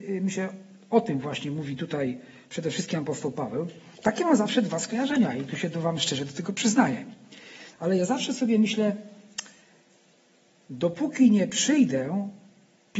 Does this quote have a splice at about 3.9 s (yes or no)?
yes